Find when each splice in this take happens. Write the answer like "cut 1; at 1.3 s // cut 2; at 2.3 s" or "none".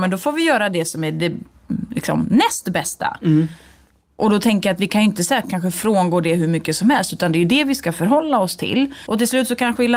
cut 1; at 3.2 s // cut 2; at 9.1 s